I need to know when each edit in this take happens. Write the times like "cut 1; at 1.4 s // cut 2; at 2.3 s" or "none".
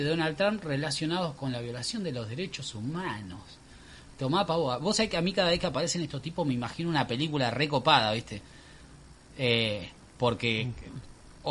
none